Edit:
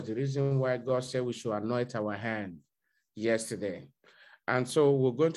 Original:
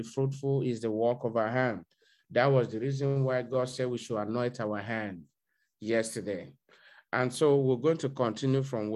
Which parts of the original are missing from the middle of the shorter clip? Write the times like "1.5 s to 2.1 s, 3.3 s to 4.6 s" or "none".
none